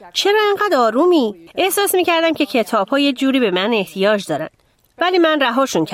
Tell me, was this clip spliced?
yes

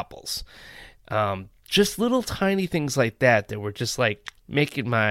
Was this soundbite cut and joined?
no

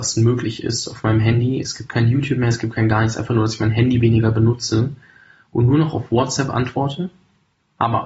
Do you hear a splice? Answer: no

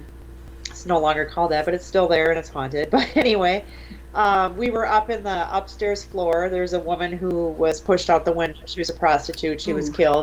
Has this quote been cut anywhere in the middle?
no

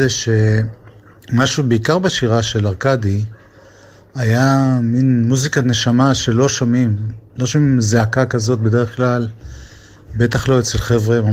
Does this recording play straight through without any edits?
yes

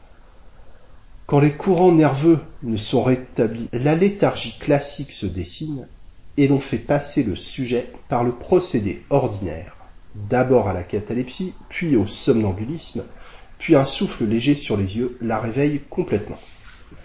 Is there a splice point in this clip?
yes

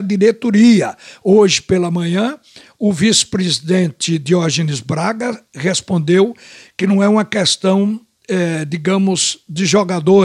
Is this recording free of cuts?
yes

